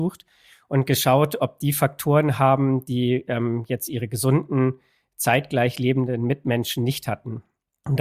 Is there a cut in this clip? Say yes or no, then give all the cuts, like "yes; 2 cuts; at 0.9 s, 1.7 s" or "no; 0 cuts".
no; 0 cuts